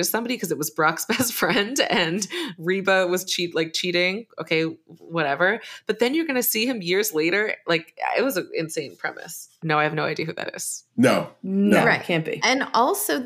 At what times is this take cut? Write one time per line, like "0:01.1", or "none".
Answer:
0:09.6